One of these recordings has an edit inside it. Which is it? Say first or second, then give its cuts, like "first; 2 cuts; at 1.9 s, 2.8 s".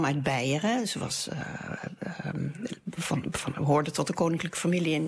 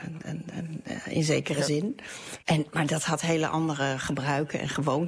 second; 1 cut; at 2.4 s